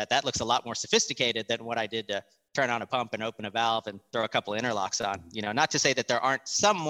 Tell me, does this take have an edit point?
no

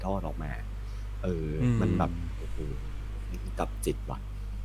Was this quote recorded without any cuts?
yes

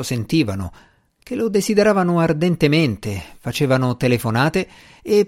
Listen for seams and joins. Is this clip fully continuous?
no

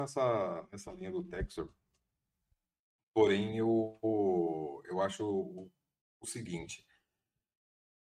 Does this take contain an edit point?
no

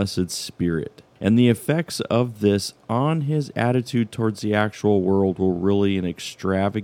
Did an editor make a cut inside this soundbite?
no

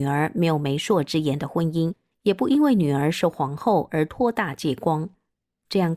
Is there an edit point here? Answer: yes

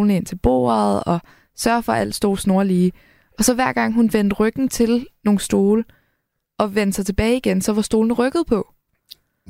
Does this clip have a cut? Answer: no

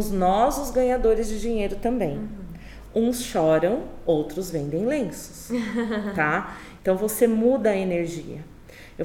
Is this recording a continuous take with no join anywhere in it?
no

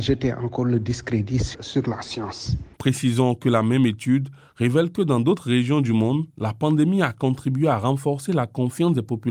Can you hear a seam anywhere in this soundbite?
yes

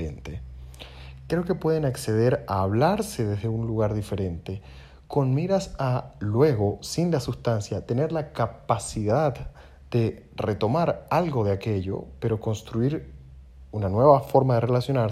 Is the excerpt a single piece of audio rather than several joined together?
yes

